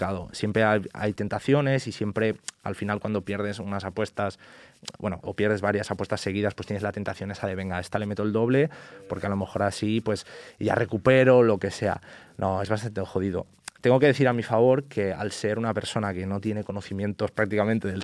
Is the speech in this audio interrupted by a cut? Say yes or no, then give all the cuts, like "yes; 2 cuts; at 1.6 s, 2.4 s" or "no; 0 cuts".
yes; 1 cut; at 5.2 s